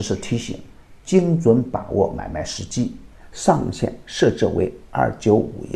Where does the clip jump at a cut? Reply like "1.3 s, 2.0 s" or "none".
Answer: 3.2 s

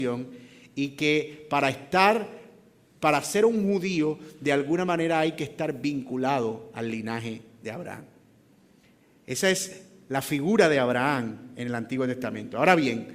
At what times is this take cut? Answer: none

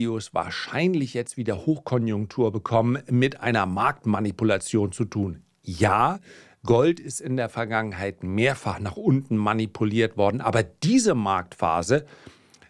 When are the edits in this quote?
none

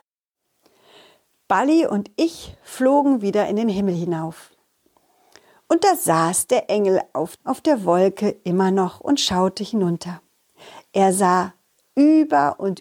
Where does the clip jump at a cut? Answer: 7.3 s

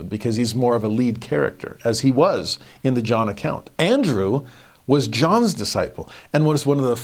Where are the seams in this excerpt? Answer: 3.7 s

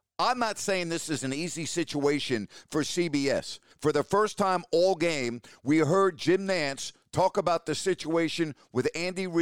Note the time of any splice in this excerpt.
3.7 s

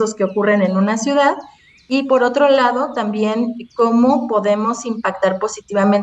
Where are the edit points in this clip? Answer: none

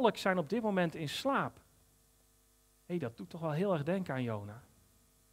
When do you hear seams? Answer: none

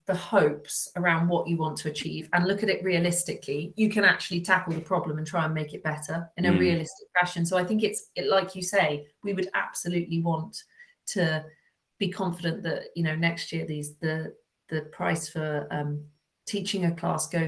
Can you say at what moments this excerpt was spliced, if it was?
none

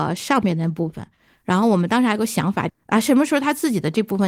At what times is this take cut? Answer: 2.7 s

